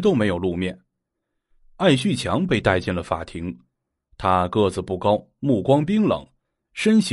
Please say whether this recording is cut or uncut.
uncut